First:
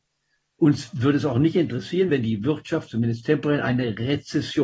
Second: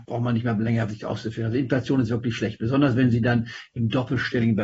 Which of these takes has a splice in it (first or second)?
first